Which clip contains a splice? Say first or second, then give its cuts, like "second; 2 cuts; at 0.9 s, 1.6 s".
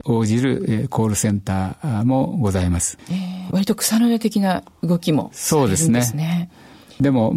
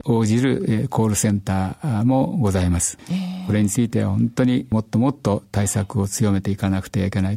first; 1 cut; at 3.5 s